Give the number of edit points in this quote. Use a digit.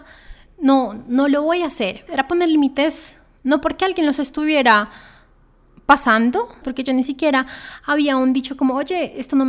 2